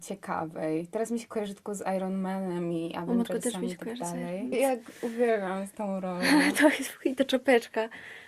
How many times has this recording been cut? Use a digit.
1